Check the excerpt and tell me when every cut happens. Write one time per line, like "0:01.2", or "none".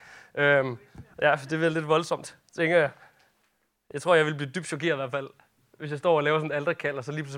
0:01.1

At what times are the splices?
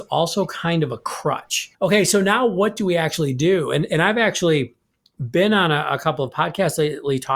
0:01.7

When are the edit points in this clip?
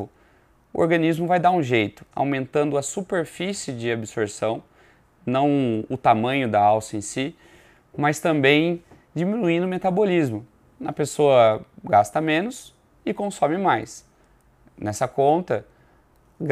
0:02.1

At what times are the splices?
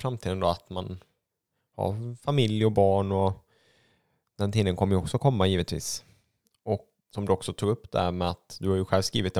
0:07.0

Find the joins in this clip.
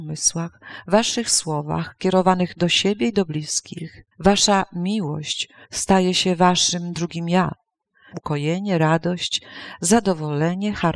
0:04.1
0:05.6
0:08.1

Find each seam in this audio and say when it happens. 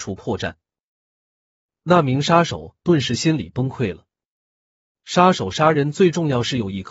0:04.9

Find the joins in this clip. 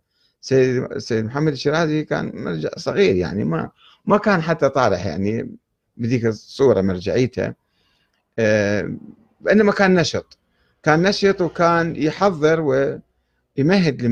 none

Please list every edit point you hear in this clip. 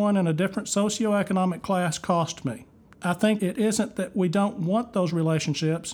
0:02.9

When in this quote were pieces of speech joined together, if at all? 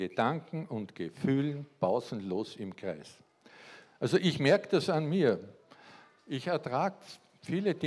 0:03.9

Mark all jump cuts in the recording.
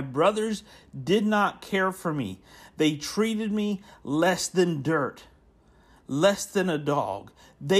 none

